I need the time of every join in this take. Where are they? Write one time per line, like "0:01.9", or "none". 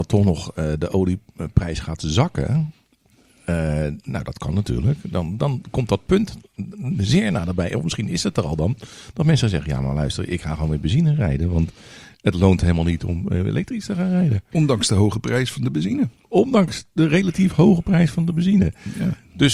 0:14.5